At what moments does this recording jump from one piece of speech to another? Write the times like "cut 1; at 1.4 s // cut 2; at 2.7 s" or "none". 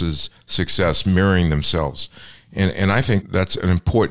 cut 1; at 3.2 s

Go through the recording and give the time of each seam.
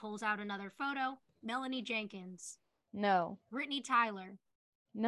cut 1; at 3.4 s

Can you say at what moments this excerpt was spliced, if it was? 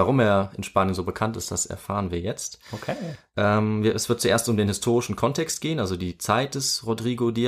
none

